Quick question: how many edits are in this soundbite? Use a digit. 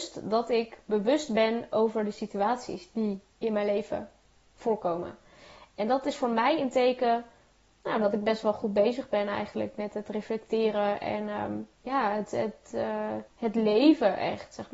2